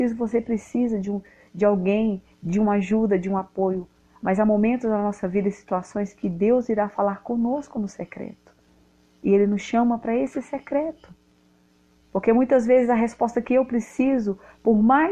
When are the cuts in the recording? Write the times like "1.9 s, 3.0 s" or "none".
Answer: 2.3 s